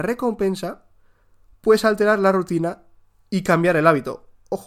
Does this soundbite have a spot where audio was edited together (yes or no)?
no